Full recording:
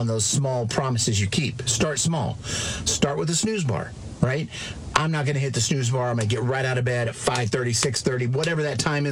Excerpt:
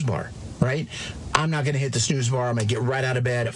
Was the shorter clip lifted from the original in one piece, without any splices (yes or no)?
yes